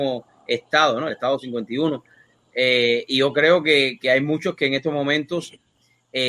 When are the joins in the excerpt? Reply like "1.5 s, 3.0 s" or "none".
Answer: none

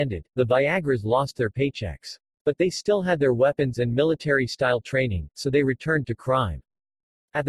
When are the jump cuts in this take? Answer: none

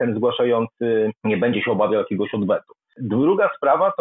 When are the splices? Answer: 1.1 s

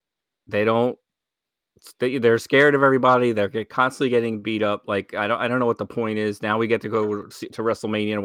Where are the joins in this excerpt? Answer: none

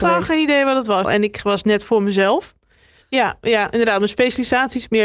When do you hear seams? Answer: 1.0 s, 3.0 s

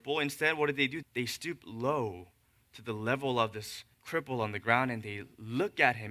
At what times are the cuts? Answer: 1.0 s, 3.9 s

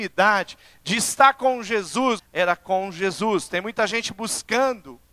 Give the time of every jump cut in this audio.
2.2 s

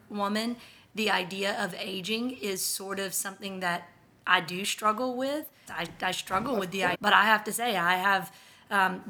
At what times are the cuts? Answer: 5.7 s, 6.9 s

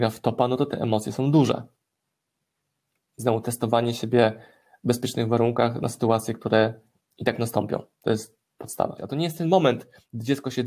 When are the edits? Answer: 9.0 s

